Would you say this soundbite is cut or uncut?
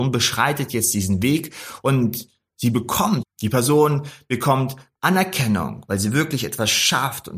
cut